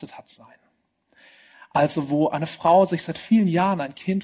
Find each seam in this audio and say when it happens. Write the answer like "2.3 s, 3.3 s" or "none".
none

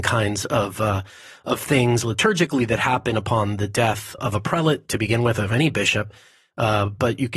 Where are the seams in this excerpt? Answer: 4.2 s

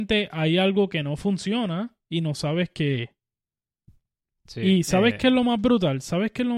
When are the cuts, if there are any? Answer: none

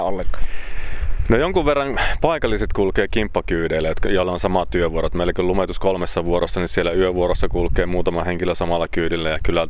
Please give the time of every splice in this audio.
none

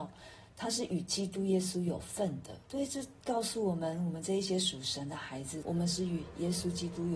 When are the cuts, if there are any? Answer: 2.6 s, 5.6 s

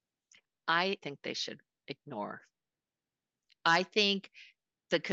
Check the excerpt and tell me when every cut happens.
1.0 s

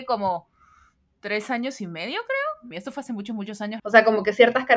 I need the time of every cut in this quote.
2.7 s, 3.8 s

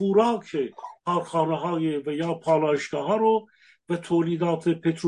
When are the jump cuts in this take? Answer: 1.0 s

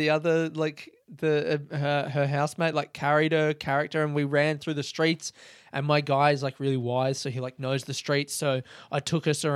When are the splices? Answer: none

